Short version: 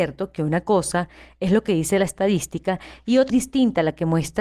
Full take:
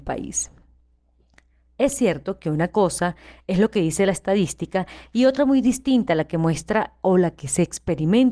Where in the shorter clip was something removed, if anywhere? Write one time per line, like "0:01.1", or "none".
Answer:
0:03.3